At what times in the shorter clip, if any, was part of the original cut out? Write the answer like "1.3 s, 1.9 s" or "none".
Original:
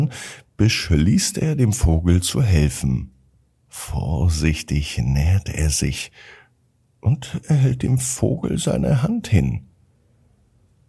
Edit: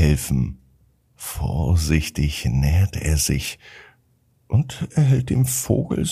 none